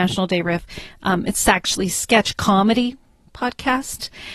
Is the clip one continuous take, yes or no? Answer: yes